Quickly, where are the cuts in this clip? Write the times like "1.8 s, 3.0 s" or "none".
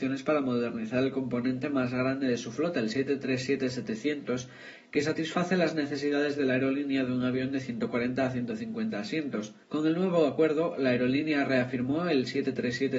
9.6 s